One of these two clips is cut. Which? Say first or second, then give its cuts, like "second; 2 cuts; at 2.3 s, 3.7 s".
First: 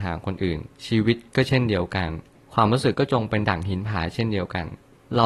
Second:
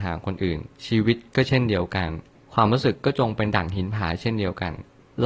first; 1 cut; at 2.9 s